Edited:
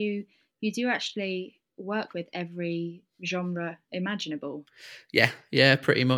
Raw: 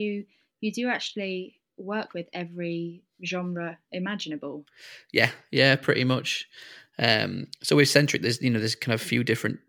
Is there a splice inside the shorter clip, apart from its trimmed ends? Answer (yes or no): no